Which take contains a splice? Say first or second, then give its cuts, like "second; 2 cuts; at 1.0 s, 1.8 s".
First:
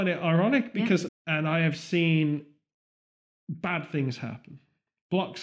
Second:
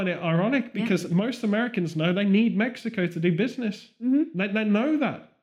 first; 1 cut; at 1.1 s